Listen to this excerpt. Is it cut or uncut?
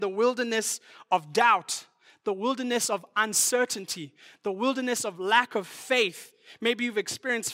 uncut